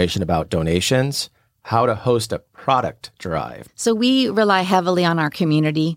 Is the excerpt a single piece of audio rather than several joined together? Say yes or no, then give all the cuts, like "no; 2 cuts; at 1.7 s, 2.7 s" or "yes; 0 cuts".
no; 1 cut; at 3.7 s